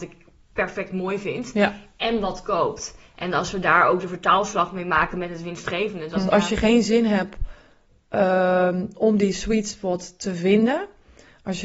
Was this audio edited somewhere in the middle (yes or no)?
yes